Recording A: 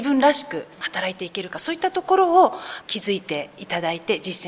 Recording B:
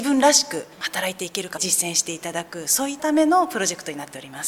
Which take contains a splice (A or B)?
B